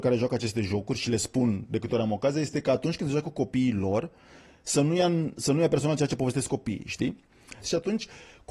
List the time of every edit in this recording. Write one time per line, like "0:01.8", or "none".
0:07.6